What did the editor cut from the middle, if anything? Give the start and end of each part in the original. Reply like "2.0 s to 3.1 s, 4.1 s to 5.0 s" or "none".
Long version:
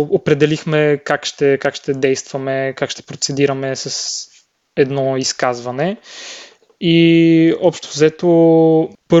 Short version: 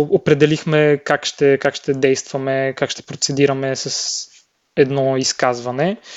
none

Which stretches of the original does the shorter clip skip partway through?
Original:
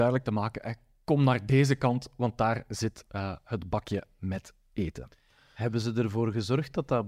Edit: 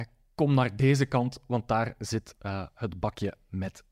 none

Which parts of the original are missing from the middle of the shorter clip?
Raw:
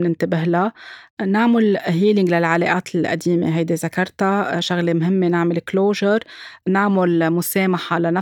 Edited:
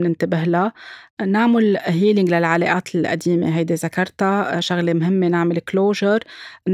none

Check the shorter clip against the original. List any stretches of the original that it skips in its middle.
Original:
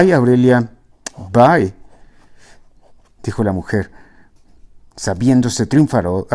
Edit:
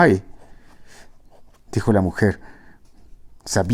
none

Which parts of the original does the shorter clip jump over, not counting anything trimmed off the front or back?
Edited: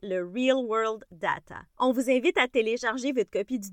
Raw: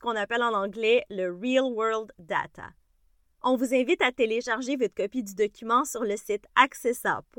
2.8 s to 3.3 s

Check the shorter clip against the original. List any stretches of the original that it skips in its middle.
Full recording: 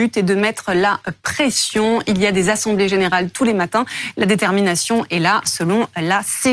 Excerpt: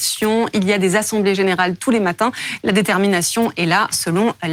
none

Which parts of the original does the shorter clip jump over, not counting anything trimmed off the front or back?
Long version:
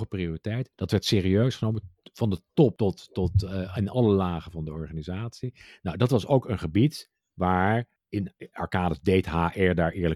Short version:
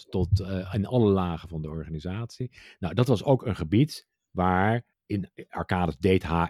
none

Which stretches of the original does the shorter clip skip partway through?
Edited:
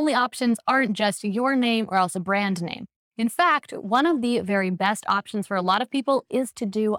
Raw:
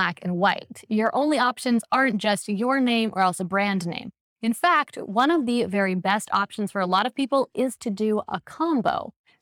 none

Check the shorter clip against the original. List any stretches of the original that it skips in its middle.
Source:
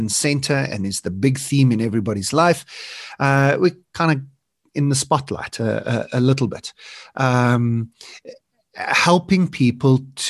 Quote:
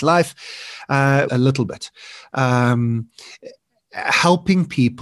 3.6 s to 6.1 s

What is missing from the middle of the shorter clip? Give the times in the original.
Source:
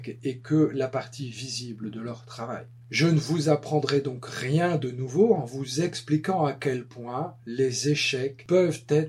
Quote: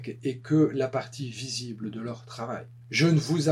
none

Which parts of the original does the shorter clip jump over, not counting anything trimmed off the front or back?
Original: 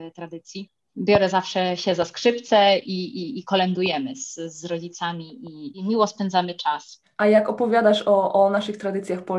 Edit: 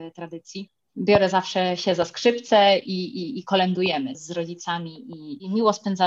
4.1 s to 4.5 s

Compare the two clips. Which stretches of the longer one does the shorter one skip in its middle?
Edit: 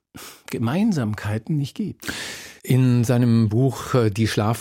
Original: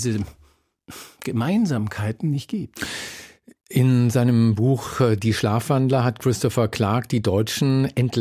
3.3 s to 3.6 s

